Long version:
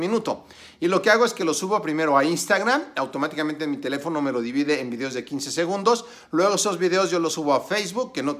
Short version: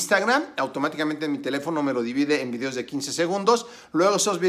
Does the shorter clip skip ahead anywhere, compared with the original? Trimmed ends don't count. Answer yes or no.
no